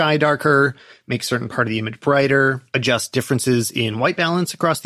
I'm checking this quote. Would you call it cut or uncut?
uncut